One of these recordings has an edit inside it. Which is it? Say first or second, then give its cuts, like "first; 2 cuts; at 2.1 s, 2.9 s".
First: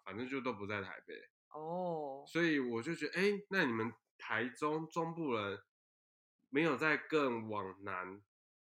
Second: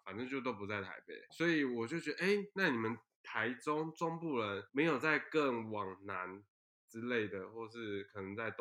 second; 2 cuts; at 1.3 s, 4.7 s